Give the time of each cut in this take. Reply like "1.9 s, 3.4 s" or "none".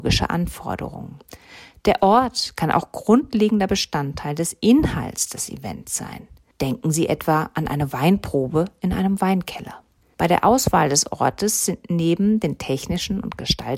none